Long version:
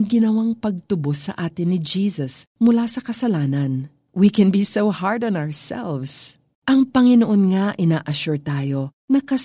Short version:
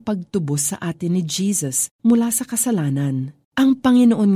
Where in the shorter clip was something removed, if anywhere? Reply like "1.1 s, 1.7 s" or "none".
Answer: 3.4 s